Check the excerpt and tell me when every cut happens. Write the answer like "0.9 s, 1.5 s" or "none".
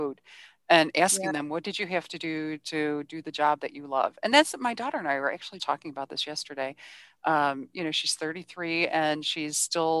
5.6 s